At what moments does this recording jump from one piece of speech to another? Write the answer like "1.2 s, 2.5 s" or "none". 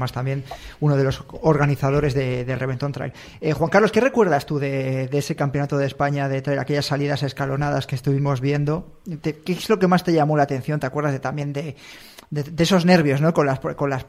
none